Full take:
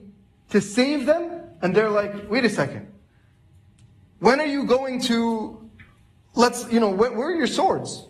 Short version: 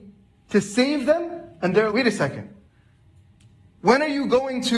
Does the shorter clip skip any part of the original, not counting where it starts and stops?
yes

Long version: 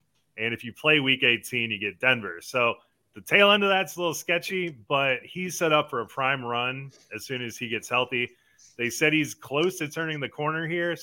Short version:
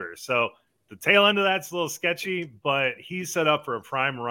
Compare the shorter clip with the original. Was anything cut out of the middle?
no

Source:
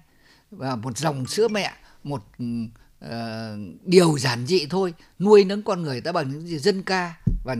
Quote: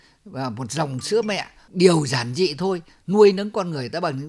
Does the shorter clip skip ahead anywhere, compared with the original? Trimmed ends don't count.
yes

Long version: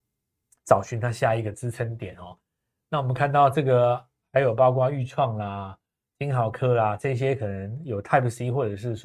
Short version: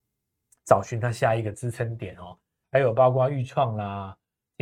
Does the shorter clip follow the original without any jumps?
no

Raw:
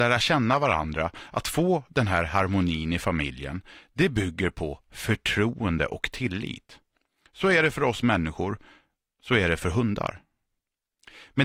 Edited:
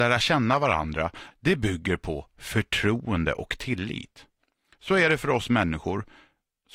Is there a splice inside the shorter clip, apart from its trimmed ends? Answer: yes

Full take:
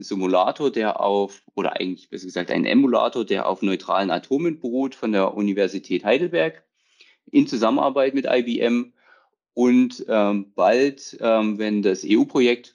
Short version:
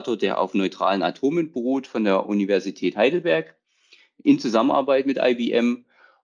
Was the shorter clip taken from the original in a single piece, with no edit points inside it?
yes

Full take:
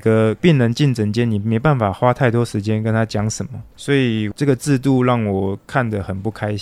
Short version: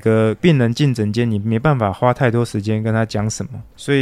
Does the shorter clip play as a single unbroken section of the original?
yes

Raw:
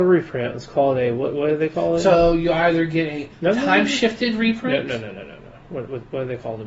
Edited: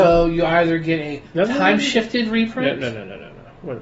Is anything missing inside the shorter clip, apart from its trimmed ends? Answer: no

